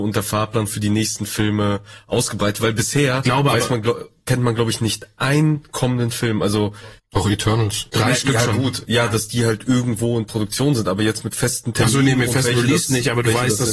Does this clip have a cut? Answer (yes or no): no